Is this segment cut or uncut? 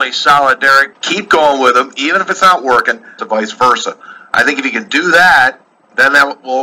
cut